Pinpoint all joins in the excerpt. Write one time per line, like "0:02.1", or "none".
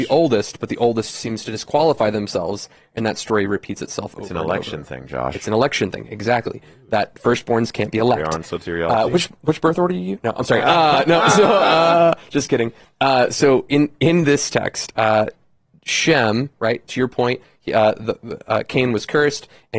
0:16.6